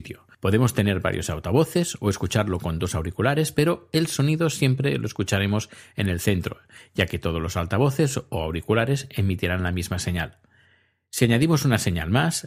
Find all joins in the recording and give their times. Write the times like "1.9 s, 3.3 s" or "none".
none